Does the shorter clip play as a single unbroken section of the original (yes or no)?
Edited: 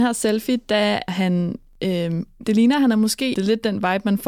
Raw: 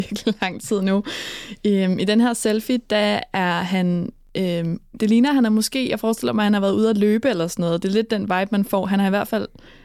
no